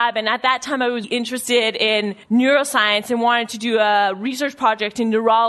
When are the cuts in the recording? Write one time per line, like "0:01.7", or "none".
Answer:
0:01.0
0:02.2